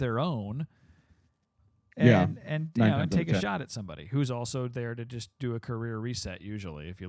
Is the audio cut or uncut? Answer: uncut